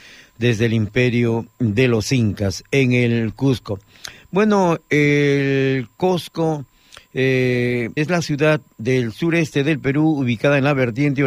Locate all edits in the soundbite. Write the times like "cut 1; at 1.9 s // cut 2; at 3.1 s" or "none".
cut 1; at 8.0 s